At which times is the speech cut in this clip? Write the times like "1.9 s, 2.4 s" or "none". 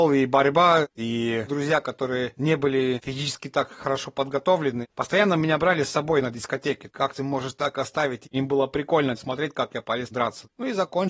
6.9 s, 8.3 s